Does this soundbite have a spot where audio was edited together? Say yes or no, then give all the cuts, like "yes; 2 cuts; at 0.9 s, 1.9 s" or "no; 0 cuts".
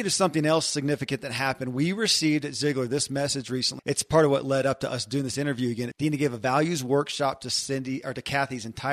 yes; 2 cuts; at 3.8 s, 5.9 s